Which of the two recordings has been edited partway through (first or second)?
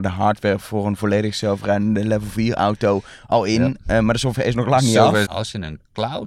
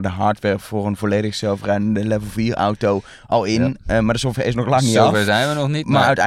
first